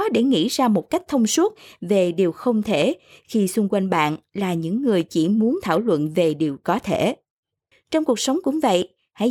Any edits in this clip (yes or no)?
yes